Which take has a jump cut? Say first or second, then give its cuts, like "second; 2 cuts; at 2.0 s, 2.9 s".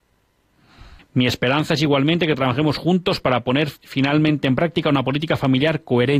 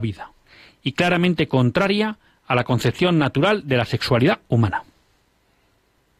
first; 2 cuts; at 1.0 s, 3.8 s